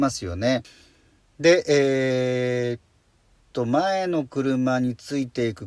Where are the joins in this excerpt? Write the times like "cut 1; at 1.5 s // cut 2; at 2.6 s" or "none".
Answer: none